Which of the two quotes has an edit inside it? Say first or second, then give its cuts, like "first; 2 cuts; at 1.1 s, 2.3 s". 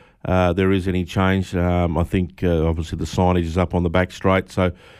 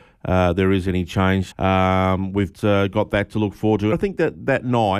second; 3 cuts; at 1.5 s, 2.5 s, 3.9 s